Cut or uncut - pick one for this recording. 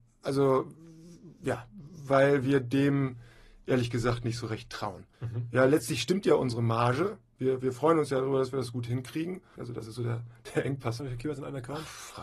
cut